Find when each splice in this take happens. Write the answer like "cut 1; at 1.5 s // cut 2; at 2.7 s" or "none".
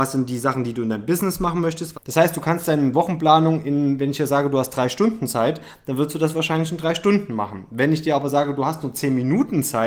cut 1; at 1.9 s